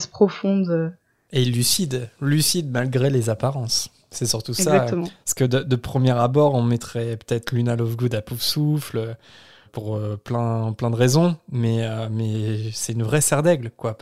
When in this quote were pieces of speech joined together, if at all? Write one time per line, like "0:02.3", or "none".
0:01.3